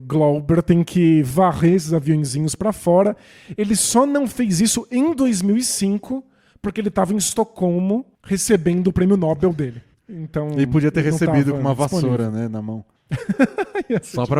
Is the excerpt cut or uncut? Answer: uncut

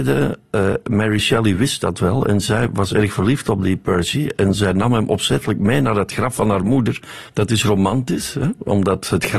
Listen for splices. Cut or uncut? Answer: cut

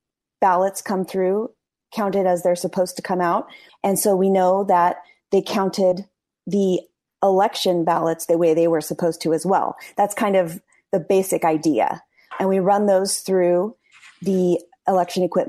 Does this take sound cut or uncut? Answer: cut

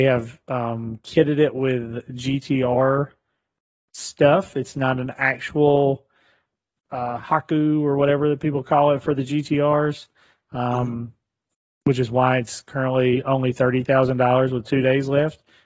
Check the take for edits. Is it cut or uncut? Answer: uncut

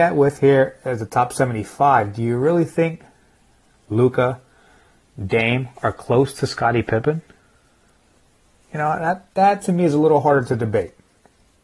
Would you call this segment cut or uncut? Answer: uncut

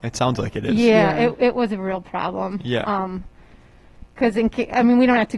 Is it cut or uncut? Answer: uncut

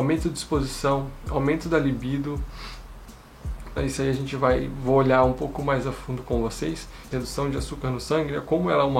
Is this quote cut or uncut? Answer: cut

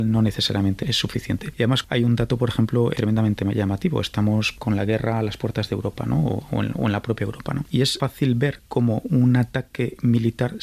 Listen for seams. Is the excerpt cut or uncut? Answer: cut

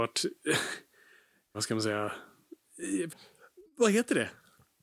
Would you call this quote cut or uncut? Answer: cut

